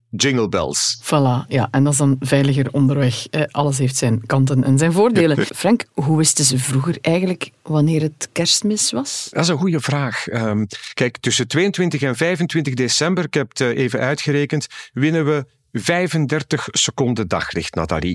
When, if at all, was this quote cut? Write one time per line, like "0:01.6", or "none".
0:05.5